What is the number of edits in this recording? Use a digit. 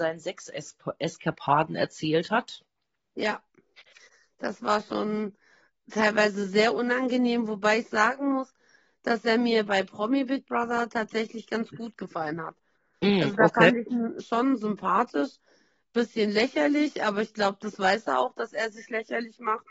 0